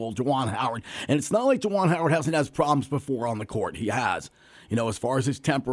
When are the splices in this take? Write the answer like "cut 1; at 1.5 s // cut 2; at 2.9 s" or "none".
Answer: none